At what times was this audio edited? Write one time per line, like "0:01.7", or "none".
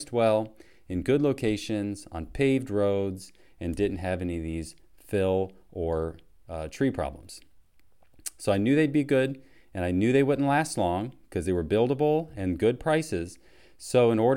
none